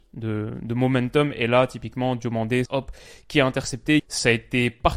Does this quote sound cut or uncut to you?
cut